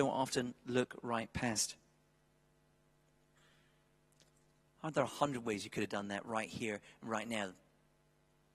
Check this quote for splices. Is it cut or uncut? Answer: cut